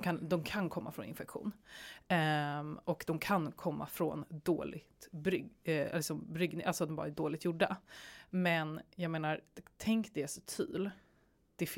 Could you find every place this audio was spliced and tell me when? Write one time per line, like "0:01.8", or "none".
none